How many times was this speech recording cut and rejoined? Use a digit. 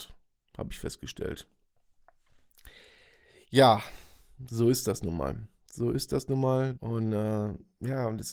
1